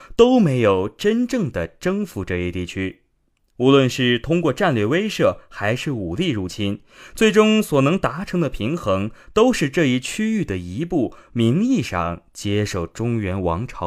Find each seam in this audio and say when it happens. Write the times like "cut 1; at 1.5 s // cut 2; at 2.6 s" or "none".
none